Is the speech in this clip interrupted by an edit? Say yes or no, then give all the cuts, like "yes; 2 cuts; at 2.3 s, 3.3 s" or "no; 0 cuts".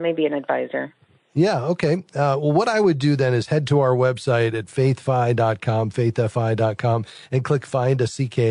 no; 0 cuts